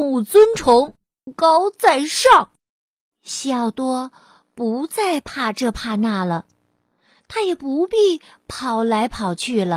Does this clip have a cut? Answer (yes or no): yes